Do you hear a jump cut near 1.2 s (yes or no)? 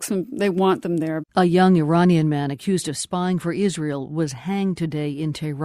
yes